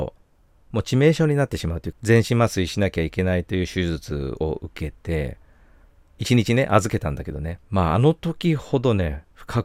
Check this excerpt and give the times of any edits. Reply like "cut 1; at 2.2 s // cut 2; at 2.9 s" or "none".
cut 1; at 1.9 s